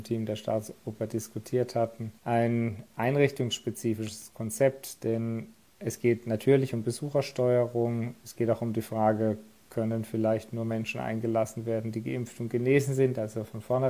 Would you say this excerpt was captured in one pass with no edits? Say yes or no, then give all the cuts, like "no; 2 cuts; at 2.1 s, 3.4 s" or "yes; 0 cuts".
no; 1 cut; at 2.2 s